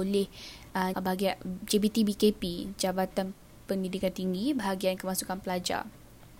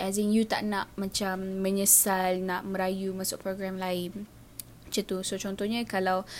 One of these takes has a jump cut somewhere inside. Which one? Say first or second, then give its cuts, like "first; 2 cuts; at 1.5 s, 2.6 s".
first; 1 cut; at 0.9 s